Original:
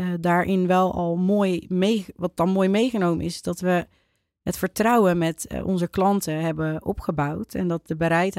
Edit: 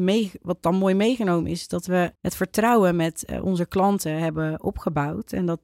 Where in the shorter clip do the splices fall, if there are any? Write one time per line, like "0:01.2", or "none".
0:02.1